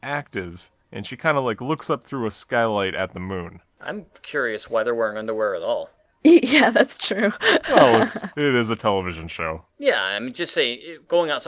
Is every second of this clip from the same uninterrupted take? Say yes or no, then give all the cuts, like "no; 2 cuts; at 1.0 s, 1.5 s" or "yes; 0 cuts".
no; 1 cut; at 9.7 s